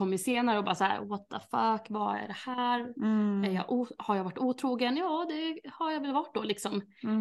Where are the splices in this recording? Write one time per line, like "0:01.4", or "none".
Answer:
none